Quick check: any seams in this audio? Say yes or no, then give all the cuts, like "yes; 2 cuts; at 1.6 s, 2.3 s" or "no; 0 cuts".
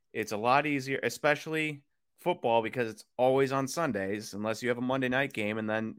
no; 0 cuts